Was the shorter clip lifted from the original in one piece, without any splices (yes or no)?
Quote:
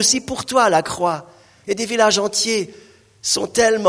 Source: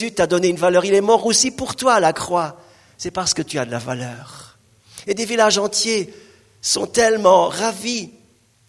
no